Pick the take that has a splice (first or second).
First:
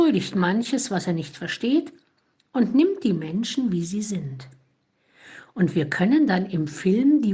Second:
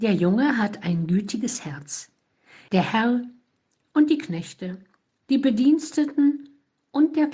second